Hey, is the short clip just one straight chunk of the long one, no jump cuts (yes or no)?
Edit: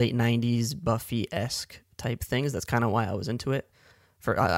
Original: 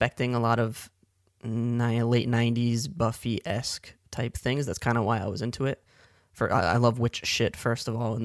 yes